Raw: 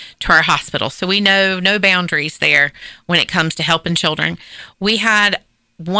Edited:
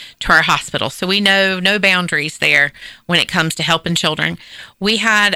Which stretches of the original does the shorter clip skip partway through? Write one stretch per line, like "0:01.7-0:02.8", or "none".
none

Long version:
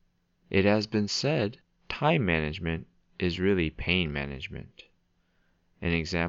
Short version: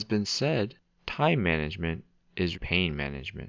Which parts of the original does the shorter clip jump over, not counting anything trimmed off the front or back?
0:03.4-0:03.7

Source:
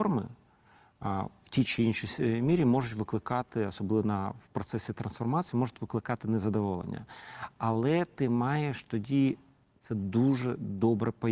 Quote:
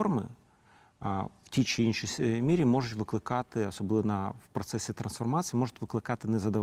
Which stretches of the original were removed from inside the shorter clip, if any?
none

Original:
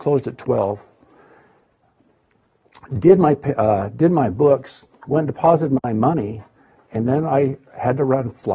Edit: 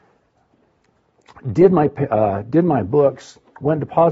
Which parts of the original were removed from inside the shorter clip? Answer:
none

